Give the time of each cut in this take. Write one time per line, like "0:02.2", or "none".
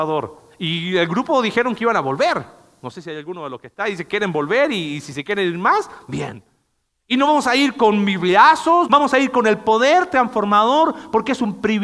0:06.9
0:08.9

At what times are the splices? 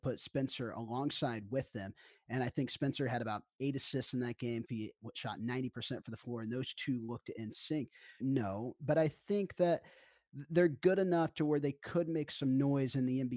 0:04.6
0:08.2

